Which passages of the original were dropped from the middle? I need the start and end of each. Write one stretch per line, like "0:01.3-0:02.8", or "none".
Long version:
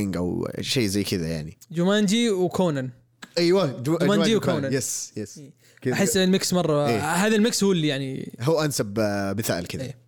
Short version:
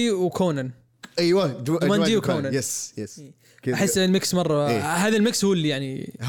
none